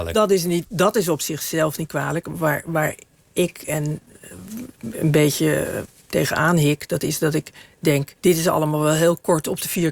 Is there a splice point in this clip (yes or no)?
yes